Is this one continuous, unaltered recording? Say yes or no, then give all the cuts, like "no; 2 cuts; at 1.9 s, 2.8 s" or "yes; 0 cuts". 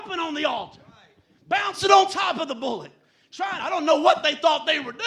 yes; 0 cuts